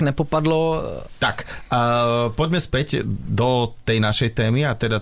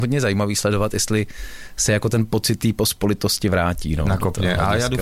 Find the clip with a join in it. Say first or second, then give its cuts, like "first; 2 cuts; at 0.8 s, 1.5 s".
first; 1 cut; at 1.2 s